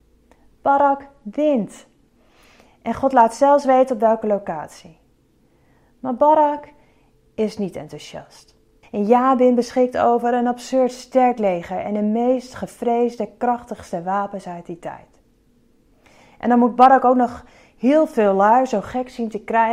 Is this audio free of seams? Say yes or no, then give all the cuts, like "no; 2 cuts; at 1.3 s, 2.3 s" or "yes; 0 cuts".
no; 1 cut; at 8.8 s